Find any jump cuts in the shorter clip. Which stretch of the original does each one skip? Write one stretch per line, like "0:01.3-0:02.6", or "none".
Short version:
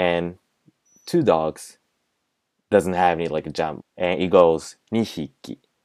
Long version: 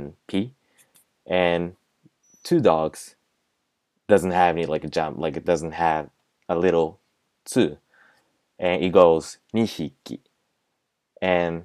0:05.2-0:08.4